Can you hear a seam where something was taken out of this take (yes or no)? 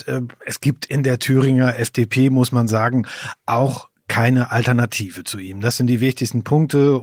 no